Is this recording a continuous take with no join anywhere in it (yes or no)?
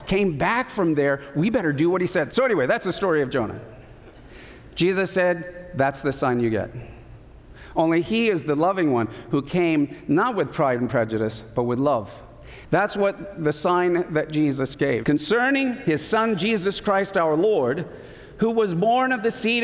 no